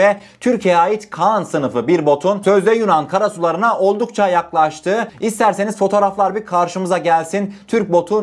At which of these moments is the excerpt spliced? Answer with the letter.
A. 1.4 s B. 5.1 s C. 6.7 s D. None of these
B